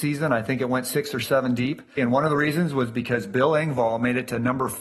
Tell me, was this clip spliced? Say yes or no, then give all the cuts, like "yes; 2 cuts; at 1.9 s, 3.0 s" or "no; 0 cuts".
yes; 1 cut; at 2.0 s